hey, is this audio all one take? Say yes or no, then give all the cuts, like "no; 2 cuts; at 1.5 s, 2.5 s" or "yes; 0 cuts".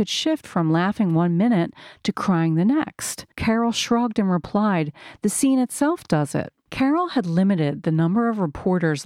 no; 2 cuts; at 3.3 s, 6.7 s